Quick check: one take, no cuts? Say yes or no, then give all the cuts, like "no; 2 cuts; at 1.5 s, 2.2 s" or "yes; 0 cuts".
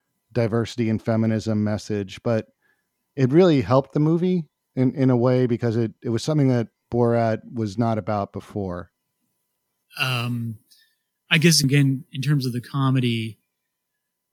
no; 2 cuts; at 9.8 s, 11.6 s